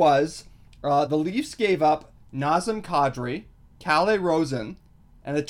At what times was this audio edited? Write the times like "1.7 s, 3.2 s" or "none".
none